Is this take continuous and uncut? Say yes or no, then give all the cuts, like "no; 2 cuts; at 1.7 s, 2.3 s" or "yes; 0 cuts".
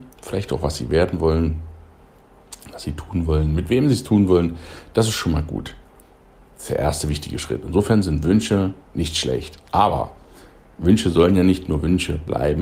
yes; 0 cuts